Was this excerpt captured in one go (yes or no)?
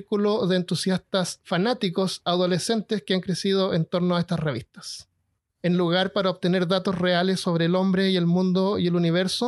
no